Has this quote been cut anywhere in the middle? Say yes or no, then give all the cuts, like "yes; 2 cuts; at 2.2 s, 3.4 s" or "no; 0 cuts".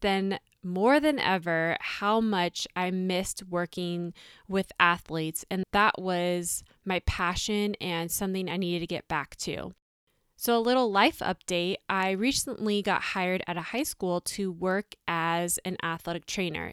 yes; 1 cut; at 5.6 s